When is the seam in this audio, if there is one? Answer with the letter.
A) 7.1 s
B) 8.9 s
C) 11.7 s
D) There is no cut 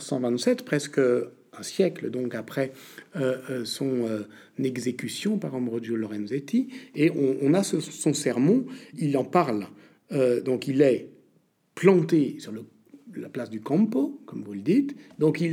B